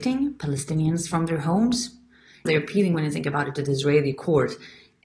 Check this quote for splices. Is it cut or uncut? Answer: cut